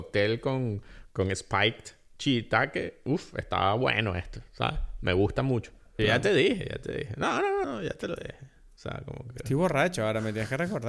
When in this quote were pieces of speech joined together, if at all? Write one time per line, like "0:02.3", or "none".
0:06.0
0:07.6